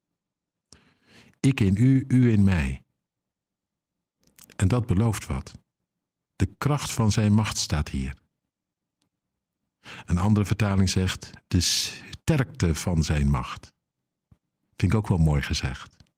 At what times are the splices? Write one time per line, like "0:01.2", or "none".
none